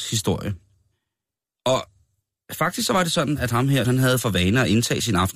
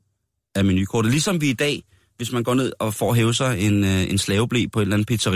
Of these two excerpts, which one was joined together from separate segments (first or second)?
first